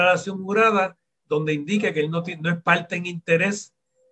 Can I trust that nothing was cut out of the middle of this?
yes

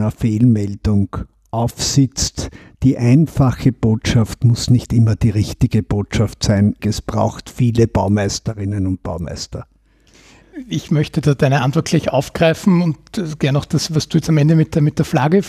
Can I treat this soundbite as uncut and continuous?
no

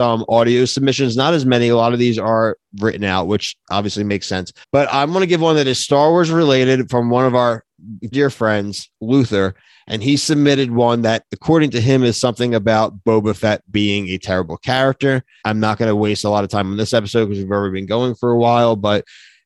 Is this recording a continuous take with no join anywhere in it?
no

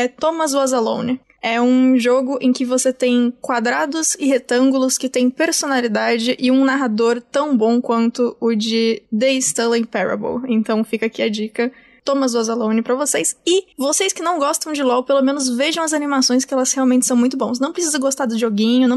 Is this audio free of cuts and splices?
no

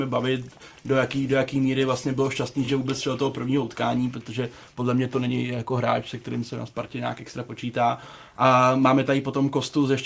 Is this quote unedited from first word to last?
yes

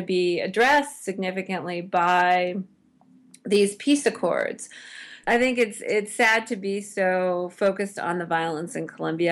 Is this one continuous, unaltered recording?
no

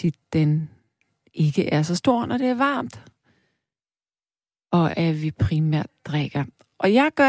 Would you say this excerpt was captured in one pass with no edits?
yes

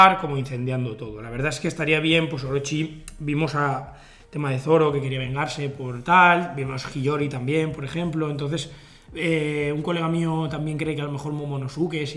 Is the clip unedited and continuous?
yes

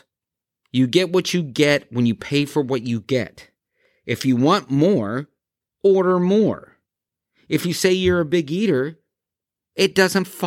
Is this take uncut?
yes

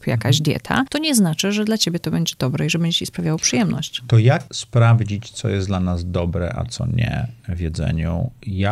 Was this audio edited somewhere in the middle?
no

